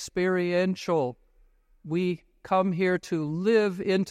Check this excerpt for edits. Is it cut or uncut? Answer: uncut